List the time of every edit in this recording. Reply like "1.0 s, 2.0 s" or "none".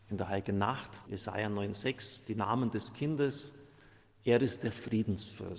1.1 s